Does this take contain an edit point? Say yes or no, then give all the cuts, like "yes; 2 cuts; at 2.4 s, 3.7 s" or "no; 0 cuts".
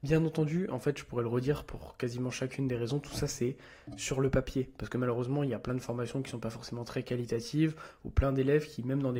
no; 0 cuts